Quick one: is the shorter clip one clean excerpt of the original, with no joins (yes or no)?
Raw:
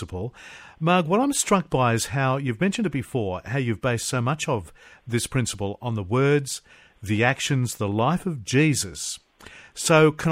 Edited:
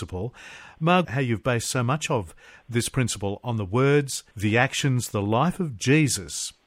no